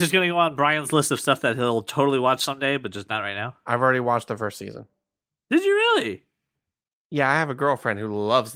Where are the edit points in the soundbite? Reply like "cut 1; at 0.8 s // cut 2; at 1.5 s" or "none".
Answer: none